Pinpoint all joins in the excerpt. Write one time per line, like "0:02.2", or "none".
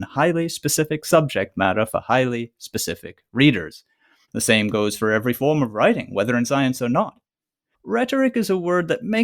0:04.3
0:07.7